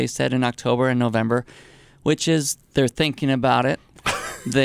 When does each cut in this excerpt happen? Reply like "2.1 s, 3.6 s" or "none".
none